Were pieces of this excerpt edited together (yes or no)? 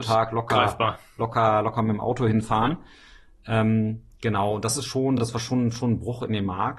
no